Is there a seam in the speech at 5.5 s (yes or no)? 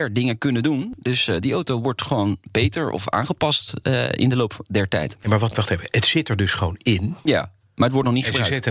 yes